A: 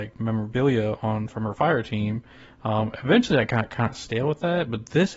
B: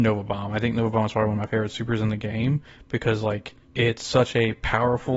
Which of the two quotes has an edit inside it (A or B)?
B